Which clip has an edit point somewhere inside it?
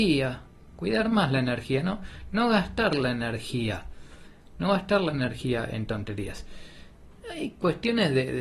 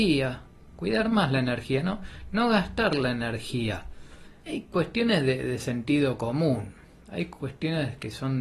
second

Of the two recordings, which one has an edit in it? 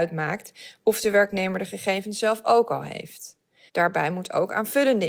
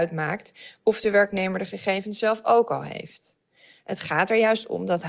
first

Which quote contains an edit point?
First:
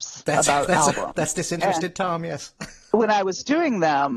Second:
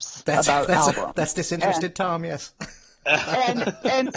first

